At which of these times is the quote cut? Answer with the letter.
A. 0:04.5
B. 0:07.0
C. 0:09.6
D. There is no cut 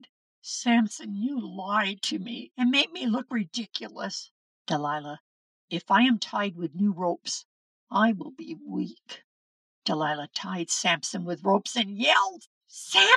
A